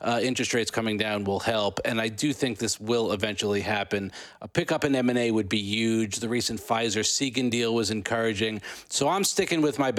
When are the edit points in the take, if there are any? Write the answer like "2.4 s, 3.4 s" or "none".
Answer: none